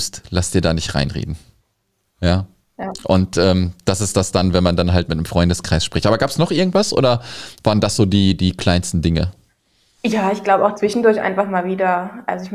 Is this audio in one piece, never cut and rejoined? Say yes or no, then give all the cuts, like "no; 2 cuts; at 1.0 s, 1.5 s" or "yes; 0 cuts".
yes; 0 cuts